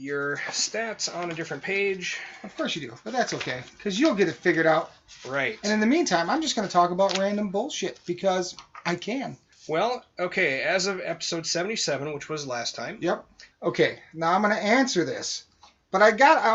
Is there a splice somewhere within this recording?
yes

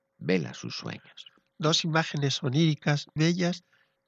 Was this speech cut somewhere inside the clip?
yes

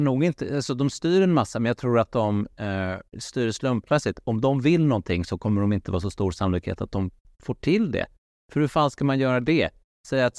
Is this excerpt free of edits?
yes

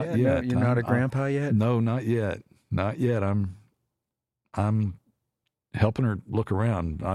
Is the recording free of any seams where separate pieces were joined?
yes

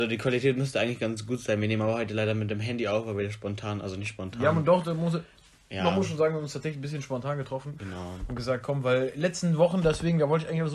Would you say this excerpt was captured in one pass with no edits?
yes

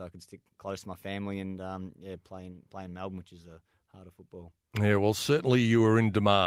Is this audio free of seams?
yes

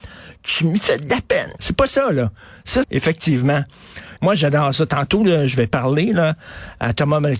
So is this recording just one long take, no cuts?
no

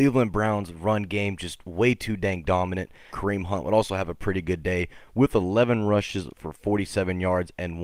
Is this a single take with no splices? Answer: no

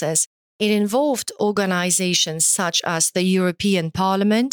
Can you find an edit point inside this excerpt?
no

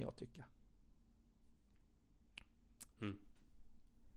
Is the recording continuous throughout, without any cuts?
no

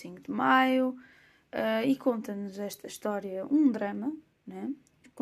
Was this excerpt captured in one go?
yes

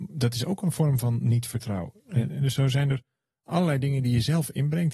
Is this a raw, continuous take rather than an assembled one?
yes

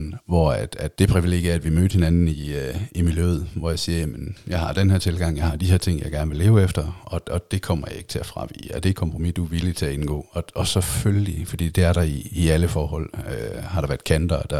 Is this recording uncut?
yes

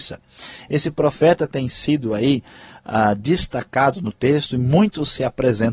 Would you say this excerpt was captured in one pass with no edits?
yes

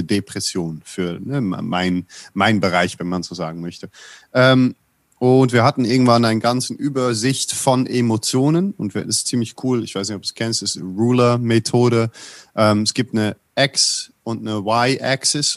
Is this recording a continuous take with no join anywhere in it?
no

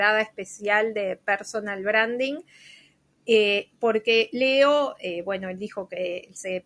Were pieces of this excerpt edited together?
no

